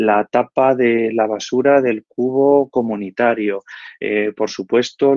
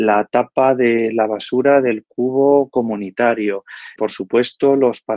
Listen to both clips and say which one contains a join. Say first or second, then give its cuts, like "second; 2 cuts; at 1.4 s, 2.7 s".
second; 1 cut; at 4.0 s